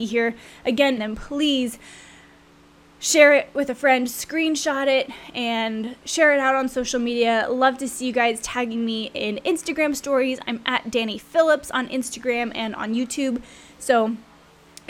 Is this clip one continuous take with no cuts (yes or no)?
no